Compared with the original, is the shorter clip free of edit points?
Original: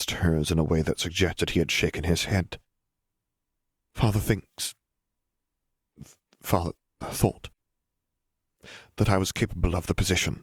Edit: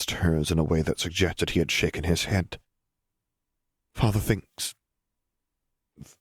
yes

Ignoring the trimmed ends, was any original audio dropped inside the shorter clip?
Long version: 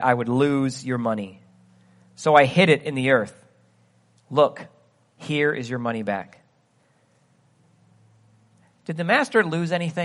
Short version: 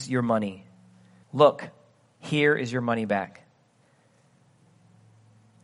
yes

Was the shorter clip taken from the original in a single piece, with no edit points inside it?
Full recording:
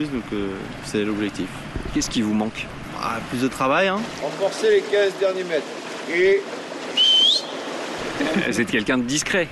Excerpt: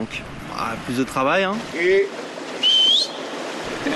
no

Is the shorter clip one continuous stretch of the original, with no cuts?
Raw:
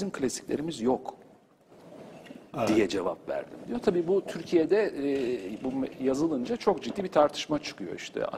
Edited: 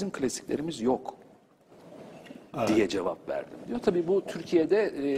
yes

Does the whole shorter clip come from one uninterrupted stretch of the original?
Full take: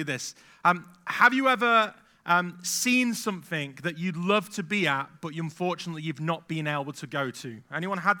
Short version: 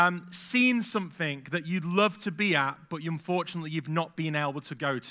yes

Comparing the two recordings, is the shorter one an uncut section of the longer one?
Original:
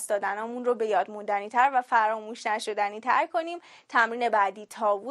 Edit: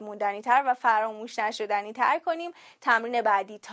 yes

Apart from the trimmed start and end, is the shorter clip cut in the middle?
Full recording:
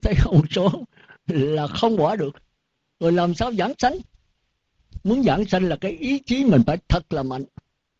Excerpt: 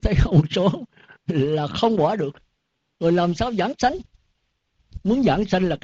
no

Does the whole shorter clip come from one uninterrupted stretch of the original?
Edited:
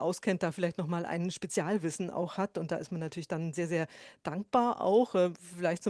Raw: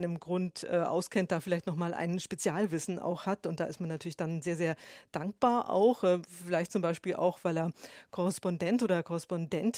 yes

